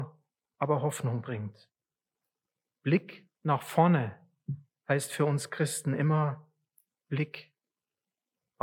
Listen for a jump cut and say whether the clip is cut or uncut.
cut